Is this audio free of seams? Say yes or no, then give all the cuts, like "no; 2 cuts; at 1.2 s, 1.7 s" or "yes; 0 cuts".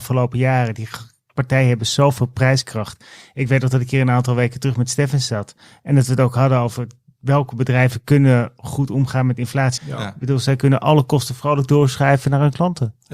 no; 1 cut; at 9.8 s